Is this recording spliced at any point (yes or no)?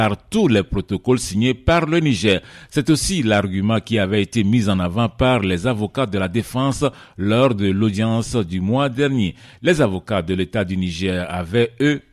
no